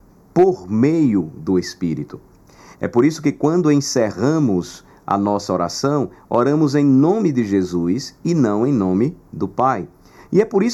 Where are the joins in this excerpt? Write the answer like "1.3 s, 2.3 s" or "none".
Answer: 2.7 s